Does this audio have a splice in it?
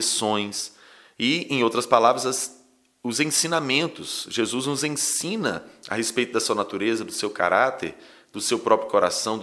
no; 0 cuts

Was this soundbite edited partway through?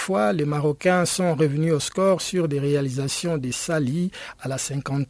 no; 0 cuts

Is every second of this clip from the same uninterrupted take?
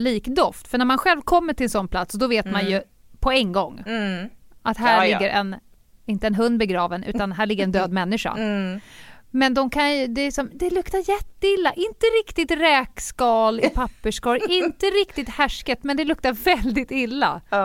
yes; 0 cuts

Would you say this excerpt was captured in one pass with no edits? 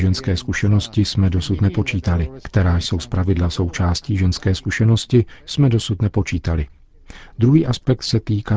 yes; 0 cuts

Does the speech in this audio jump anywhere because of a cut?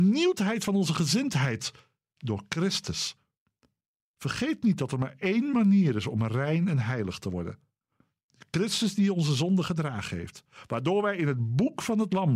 no; 0 cuts

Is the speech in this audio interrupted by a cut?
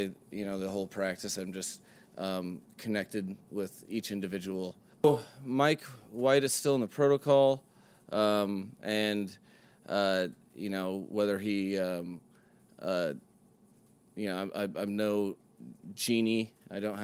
yes; 1 cut; at 4.9 s

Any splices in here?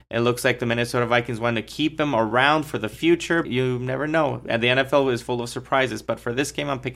yes; 1 cut; at 3.5 s

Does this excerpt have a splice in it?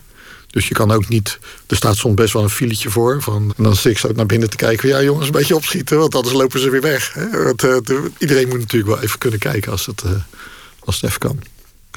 yes; 1 cut; at 3.5 s

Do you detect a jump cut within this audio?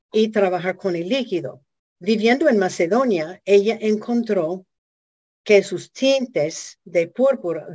yes; 1 cut; at 2.0 s

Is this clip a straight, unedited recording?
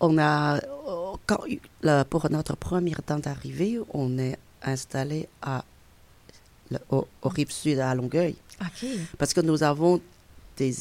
yes; 0 cuts

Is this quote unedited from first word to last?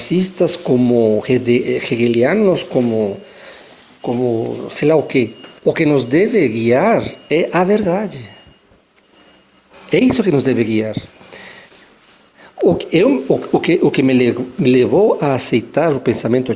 no; 1 cut; at 5.6 s

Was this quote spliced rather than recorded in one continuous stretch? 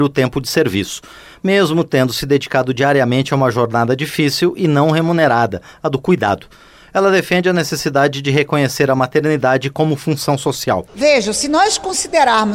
no; 0 cuts

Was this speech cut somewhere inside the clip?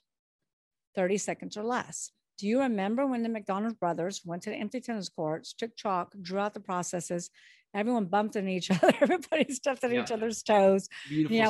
no; 0 cuts

